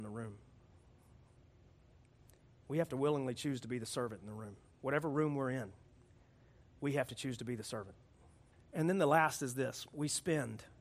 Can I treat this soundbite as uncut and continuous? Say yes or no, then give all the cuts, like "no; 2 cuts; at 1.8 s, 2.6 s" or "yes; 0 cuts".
no; 1 cut; at 8.5 s